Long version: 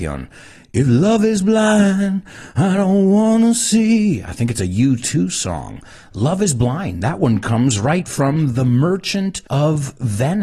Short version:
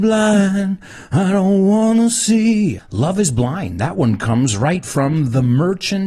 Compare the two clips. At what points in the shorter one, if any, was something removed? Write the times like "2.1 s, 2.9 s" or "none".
2.8 s